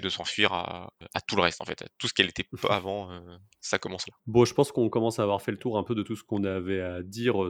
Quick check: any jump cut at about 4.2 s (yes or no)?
yes